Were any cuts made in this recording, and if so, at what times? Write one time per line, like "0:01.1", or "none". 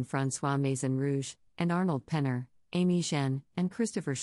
0:01.5